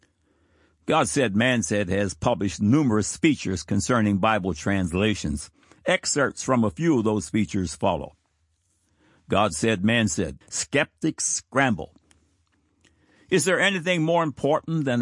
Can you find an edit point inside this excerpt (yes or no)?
yes